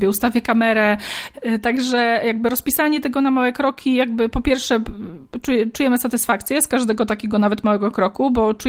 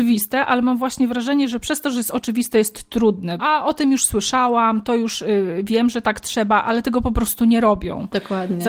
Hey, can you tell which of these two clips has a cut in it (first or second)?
second